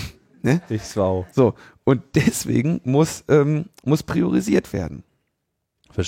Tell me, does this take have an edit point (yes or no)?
no